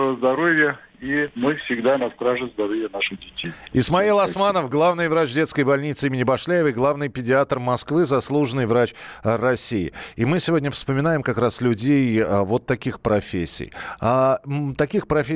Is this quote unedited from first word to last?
yes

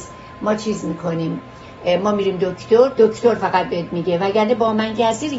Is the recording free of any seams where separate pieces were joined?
yes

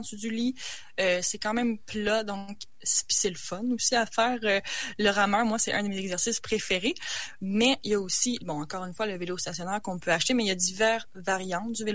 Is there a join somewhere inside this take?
no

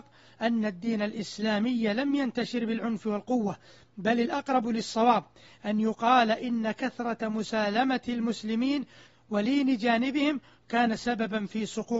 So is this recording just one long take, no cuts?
yes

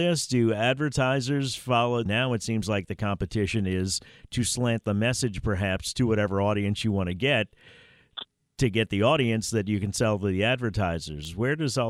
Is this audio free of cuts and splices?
no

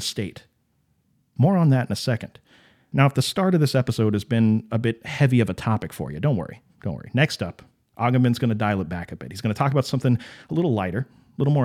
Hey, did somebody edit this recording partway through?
no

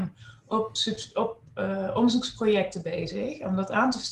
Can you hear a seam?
no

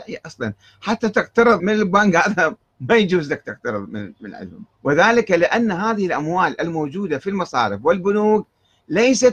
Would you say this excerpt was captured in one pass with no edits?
no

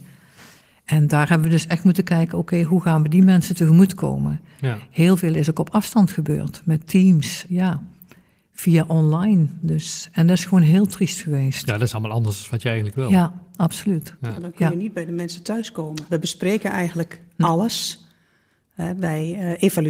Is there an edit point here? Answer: yes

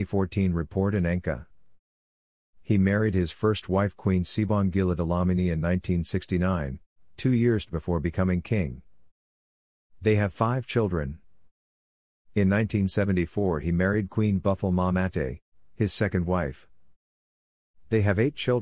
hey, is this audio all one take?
yes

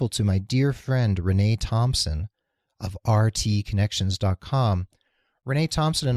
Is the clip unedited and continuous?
yes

